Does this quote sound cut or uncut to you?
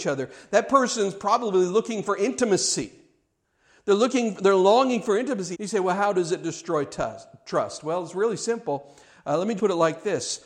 cut